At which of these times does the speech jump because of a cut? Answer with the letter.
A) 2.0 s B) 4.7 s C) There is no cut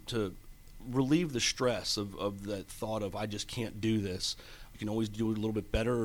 B